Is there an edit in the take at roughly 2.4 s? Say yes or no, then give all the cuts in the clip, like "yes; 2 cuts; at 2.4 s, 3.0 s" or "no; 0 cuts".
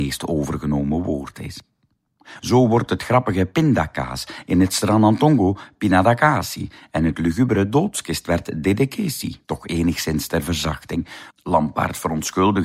yes; 3 cuts; at 2.4 s, 9.4 s, 11.3 s